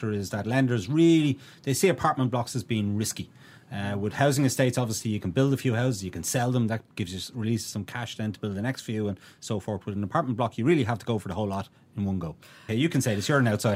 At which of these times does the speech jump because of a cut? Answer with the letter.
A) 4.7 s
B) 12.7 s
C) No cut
B